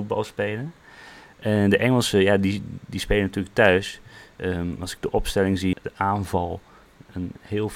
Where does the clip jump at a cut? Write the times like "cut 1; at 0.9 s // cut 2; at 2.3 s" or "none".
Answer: cut 1; at 5.7 s